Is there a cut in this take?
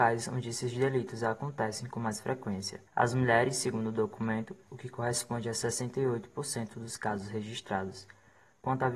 yes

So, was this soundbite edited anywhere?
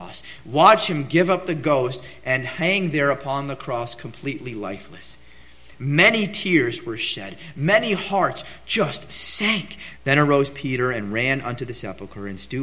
yes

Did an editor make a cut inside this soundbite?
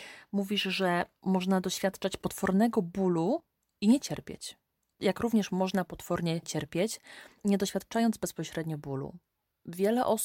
no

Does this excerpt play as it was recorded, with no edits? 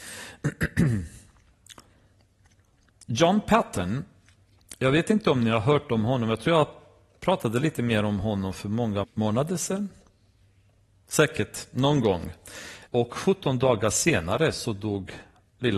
no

